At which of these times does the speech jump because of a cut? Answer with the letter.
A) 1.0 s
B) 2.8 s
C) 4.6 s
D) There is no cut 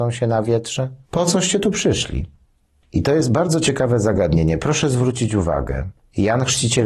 A